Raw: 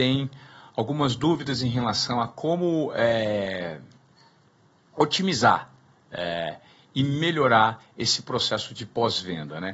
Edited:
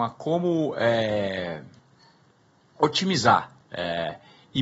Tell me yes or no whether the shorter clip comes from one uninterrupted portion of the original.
no